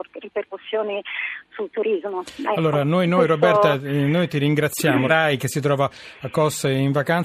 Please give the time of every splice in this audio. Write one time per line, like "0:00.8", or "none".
0:05.1